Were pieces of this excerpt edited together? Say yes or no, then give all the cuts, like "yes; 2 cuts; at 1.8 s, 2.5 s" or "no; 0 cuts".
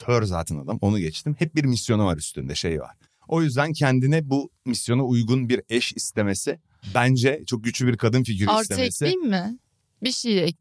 no; 0 cuts